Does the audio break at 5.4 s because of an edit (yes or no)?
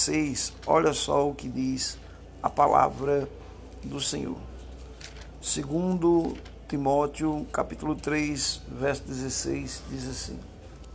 no